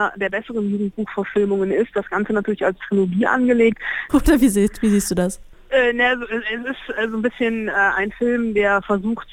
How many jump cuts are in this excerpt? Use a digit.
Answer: 1